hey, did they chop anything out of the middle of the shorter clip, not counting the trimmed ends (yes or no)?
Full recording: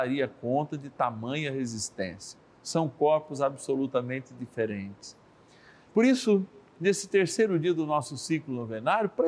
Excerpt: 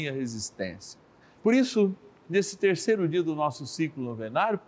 yes